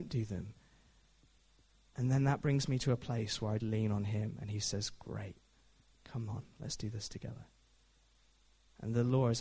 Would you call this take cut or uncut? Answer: cut